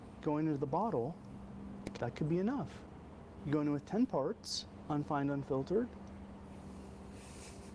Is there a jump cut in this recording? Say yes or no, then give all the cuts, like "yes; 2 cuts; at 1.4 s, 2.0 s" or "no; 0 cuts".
yes; 2 cuts; at 2.0 s, 3.4 s